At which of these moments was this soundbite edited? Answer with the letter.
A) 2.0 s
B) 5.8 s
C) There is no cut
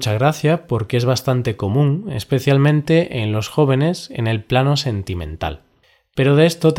C